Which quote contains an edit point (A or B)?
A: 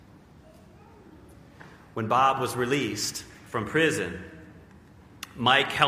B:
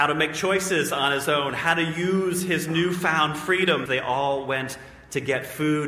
B